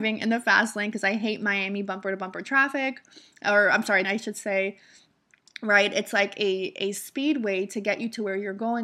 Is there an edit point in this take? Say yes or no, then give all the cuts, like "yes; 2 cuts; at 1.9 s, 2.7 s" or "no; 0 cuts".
yes; 1 cut; at 4.0 s